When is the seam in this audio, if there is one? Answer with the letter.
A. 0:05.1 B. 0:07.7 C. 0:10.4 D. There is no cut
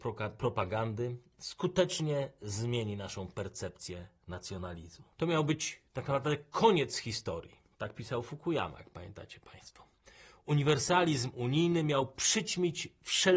A